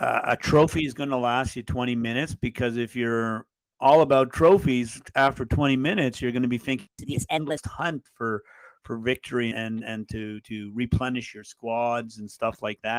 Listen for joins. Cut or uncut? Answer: cut